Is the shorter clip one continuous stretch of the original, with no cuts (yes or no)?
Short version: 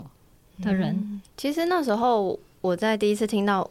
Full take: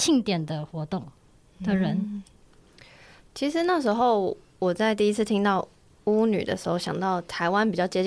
no